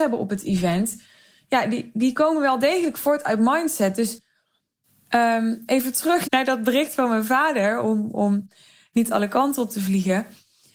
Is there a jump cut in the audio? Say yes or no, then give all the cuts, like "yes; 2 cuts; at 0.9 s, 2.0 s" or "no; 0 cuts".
yes; 1 cut; at 6.2 s